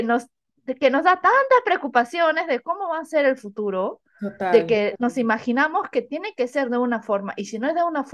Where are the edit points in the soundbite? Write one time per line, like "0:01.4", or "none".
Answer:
none